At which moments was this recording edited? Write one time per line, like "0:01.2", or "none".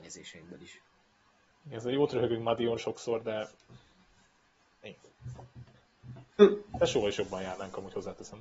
0:06.4

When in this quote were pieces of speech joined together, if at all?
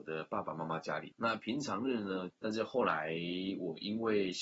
0:01.1
0:02.3

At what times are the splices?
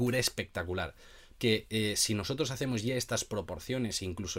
0:01.3

